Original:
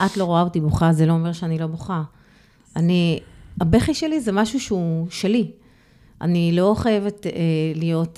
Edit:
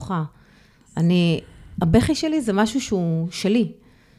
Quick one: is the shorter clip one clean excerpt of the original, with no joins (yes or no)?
yes